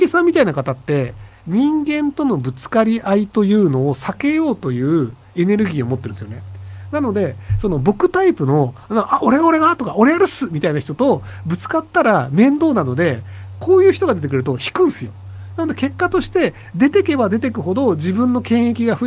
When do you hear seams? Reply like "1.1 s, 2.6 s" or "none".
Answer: none